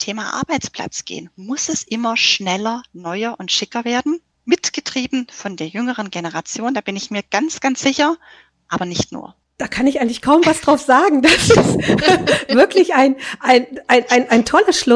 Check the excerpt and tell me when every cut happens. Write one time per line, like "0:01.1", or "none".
0:04.3